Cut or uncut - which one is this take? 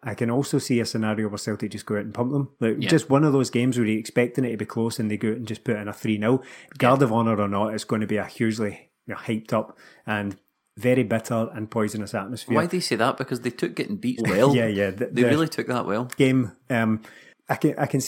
cut